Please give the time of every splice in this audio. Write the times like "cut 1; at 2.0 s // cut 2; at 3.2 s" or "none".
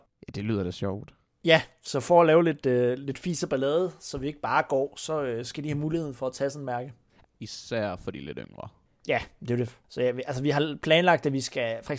cut 1; at 7.2 s